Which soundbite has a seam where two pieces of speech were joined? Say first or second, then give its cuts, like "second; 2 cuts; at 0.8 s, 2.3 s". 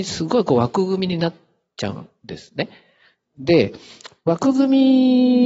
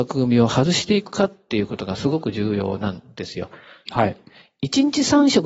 second; 1 cut; at 3.9 s